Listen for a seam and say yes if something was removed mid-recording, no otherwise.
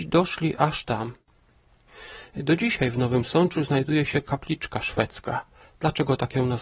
no